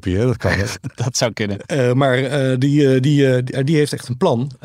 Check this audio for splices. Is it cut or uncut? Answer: uncut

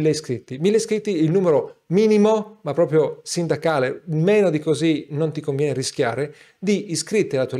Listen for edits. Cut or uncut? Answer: uncut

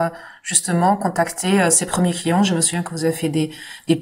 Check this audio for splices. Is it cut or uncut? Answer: uncut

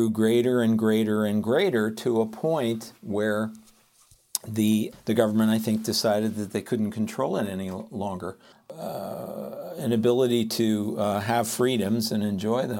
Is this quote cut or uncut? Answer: cut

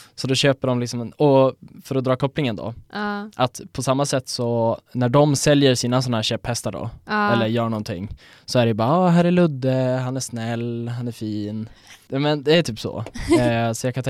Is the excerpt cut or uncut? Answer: cut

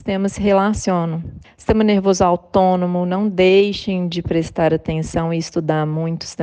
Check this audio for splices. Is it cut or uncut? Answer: cut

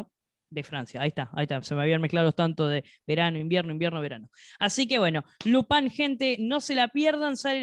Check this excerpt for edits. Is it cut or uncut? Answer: uncut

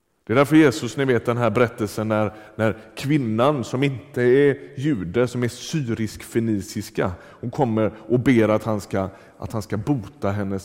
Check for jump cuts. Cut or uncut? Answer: uncut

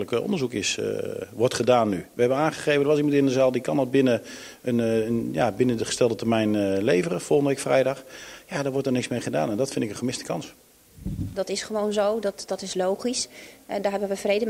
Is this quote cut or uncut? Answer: cut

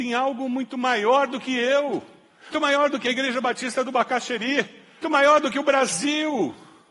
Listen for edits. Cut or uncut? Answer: cut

